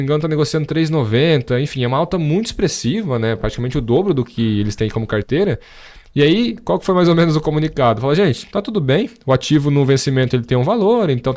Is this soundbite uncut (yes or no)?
yes